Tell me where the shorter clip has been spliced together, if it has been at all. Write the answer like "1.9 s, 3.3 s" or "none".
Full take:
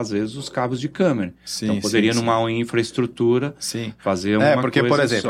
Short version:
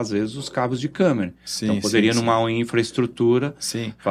none